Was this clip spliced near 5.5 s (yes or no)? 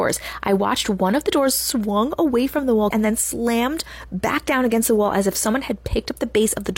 no